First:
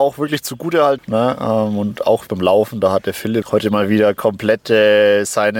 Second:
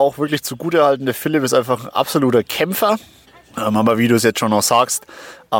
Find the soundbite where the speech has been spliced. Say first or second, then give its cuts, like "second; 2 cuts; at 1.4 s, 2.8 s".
first; 3 cuts; at 1.0 s, 2.3 s, 3.4 s